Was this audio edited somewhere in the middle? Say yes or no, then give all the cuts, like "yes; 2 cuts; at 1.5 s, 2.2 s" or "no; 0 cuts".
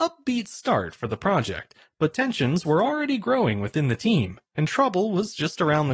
no; 0 cuts